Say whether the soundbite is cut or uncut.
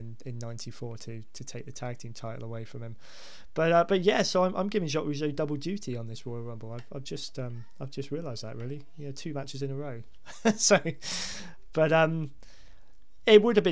uncut